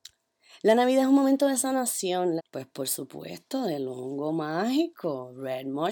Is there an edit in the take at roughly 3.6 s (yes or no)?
no